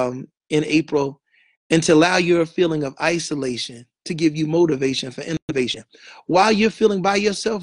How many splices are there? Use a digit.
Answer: 1